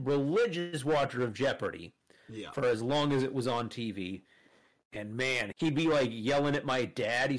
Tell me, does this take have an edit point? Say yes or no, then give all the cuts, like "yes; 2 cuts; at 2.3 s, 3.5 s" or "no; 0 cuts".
yes; 1 cut; at 5.5 s